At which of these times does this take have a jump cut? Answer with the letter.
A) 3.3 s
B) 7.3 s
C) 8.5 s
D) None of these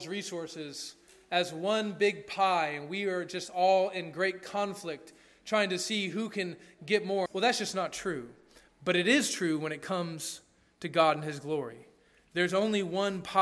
B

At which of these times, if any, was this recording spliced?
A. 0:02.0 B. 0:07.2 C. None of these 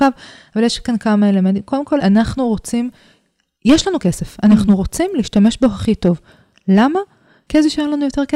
A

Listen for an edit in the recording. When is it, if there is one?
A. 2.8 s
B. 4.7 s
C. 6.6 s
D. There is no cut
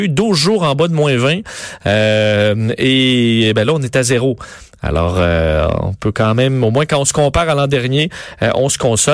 D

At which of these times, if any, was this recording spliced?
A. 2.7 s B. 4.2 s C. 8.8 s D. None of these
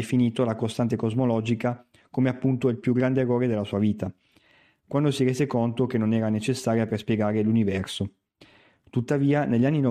D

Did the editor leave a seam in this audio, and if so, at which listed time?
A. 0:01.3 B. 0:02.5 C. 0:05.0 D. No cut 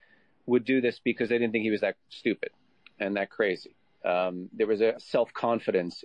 C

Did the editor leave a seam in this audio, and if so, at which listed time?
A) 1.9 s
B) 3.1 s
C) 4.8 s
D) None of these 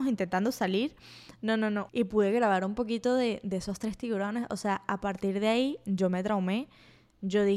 A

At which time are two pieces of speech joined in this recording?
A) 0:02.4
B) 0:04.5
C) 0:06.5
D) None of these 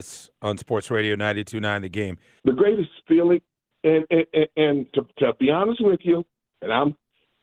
A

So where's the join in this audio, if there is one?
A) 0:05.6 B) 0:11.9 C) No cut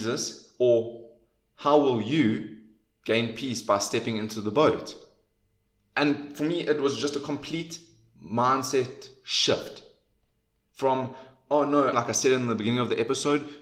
B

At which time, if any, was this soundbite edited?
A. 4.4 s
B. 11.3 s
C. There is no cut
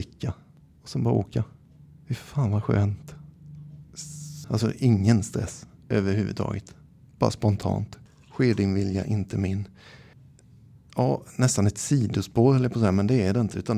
A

